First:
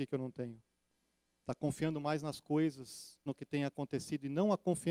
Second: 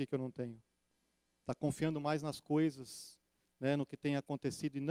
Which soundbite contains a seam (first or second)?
first